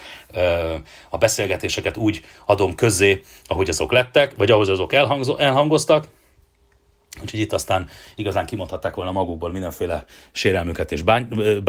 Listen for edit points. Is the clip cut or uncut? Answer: uncut